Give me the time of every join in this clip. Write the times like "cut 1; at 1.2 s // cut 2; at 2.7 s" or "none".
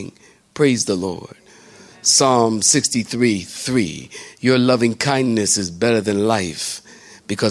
none